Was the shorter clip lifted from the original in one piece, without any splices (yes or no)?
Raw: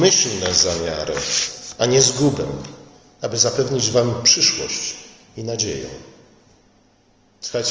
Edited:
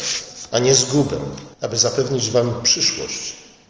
no